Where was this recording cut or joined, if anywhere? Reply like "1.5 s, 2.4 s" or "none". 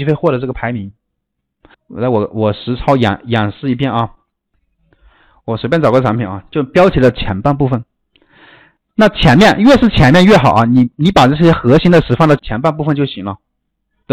1.7 s, 12.4 s